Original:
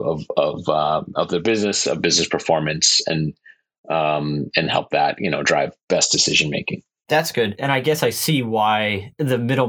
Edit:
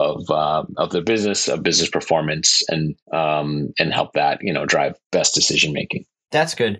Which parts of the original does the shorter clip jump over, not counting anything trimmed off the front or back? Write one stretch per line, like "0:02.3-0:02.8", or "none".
0:03.4-0:03.8